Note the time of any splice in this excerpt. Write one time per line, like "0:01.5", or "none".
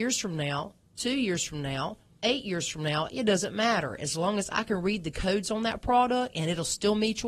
none